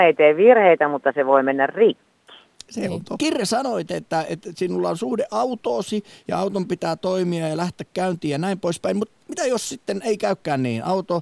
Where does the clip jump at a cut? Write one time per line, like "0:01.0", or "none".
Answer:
0:03.2